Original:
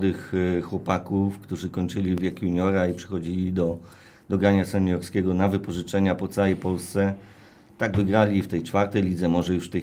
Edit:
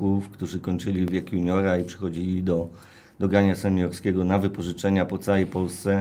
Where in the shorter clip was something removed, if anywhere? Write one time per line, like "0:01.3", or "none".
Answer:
none